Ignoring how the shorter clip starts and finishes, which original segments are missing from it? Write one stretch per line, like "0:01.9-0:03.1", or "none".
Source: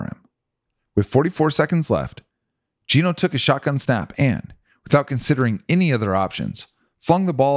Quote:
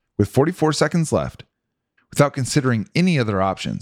0:02.8-0:04.7